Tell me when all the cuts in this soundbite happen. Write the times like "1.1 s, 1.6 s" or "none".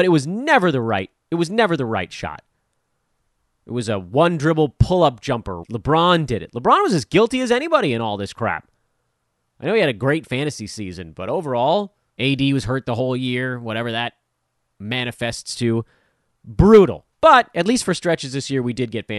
5.6 s, 12.1 s, 17.1 s

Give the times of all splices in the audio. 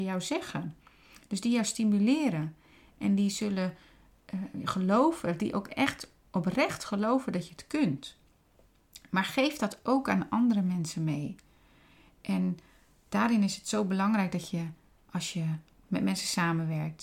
none

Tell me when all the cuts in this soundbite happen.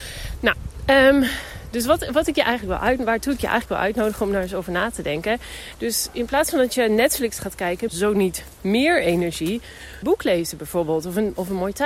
5.7 s, 7.9 s, 10.0 s

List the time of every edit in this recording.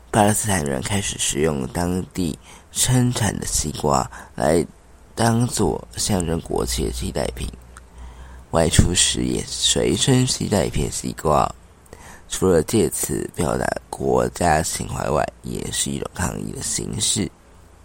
none

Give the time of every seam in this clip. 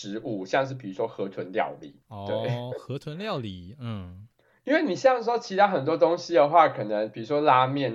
none

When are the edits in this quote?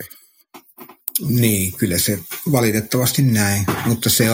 none

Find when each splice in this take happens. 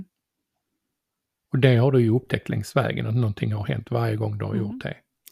none

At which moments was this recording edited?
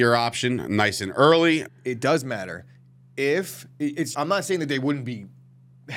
1.7 s, 4.1 s

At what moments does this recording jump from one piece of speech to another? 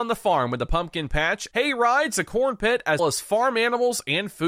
1.5 s, 3.0 s

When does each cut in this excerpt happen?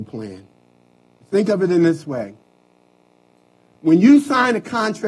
1.2 s

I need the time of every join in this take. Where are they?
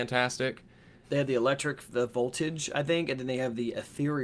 1.0 s

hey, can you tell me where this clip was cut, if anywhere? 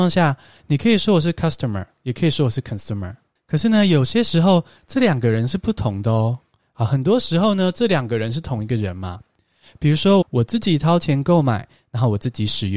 6.6 s, 10.2 s

